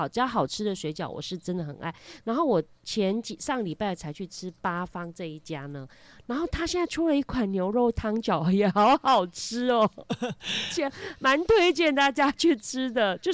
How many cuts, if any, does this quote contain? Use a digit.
1